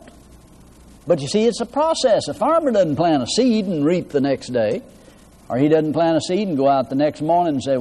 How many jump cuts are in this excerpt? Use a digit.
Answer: 1